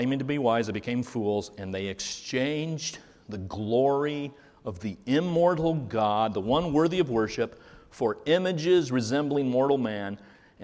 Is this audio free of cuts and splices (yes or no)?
yes